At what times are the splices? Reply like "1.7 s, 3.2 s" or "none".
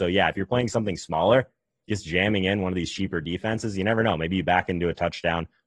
none